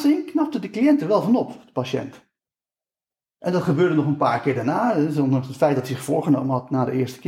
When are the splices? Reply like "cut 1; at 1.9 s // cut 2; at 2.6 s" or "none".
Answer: none

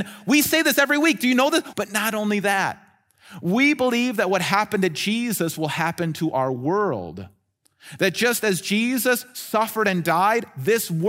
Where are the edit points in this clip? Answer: cut 1; at 1.7 s

